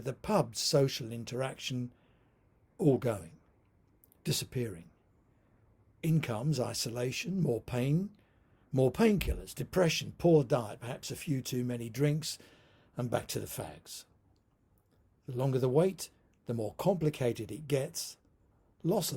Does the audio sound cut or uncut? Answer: uncut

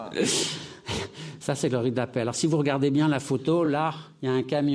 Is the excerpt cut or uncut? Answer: uncut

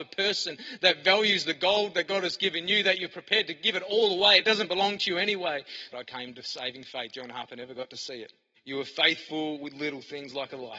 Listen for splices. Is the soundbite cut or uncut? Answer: cut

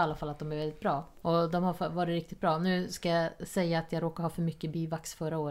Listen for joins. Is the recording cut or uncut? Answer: cut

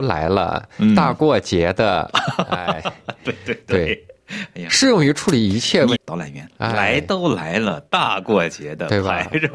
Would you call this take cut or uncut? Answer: cut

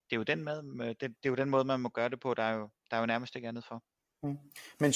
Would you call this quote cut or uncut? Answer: uncut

